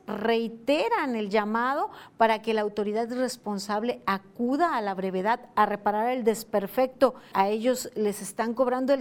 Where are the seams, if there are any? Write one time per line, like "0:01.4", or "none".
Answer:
0:07.3